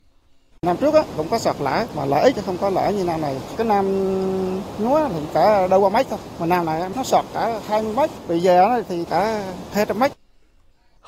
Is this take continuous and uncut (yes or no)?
yes